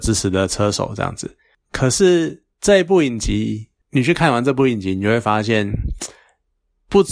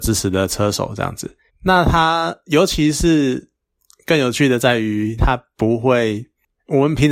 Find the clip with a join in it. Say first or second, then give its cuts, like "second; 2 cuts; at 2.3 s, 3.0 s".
second; 2 cuts; at 1.5 s, 5.2 s